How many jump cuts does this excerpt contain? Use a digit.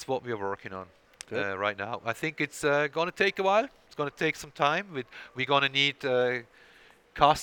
0